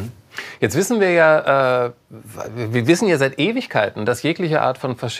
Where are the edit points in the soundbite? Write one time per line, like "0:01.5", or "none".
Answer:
none